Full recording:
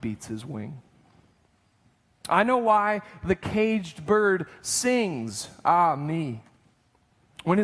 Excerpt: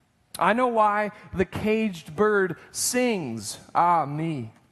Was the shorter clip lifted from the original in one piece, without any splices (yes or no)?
yes